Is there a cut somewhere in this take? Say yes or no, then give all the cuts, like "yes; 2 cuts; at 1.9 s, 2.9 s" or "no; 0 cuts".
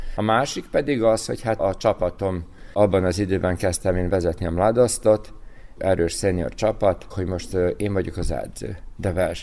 yes; 3 cuts; at 1.6 s, 5.8 s, 7.1 s